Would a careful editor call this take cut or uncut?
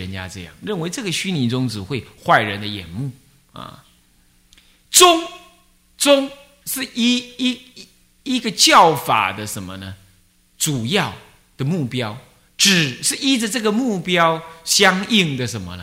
uncut